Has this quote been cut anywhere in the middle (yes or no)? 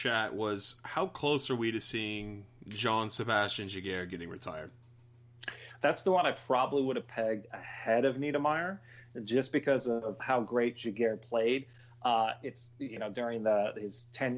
yes